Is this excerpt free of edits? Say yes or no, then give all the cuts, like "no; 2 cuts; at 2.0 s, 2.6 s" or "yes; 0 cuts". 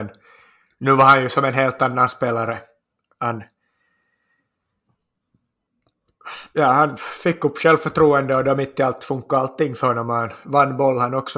yes; 0 cuts